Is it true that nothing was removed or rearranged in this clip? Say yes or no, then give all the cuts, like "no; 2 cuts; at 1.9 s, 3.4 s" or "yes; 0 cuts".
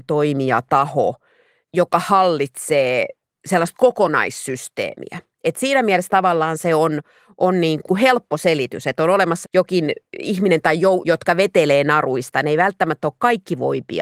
no; 2 cuts; at 9.4 s, 11.0 s